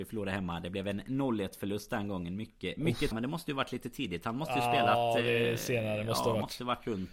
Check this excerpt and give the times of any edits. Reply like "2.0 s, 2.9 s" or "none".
3.1 s